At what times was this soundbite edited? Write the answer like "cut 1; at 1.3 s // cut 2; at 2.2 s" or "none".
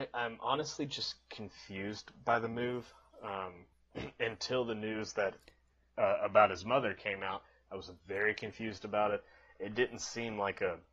none